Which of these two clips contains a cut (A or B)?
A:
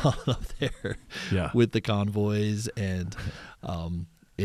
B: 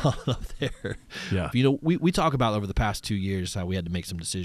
B